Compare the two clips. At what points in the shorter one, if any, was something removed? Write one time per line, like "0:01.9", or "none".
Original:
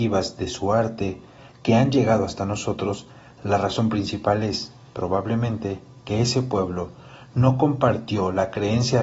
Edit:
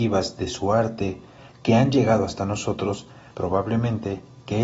0:03.3